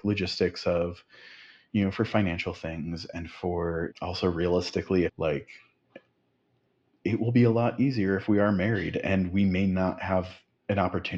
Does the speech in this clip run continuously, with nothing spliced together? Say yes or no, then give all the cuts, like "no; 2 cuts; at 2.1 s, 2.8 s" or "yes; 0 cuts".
no; 2 cuts; at 3.9 s, 5.1 s